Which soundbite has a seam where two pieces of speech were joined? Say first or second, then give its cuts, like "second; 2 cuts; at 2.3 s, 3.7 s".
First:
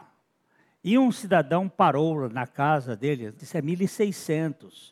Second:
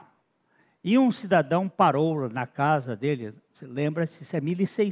first; 1 cut; at 3.4 s